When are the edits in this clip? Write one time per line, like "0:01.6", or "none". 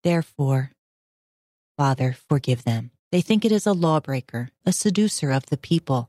0:03.0
0:04.6